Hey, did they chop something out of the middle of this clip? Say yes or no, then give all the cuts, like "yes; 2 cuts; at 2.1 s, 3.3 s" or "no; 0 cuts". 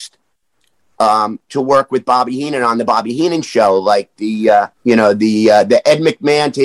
yes; 1 cut; at 4.7 s